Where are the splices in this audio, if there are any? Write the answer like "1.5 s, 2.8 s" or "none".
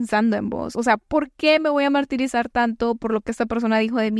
none